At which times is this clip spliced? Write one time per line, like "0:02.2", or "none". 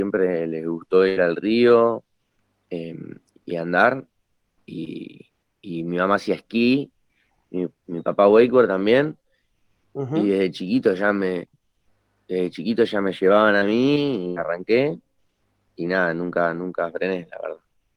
none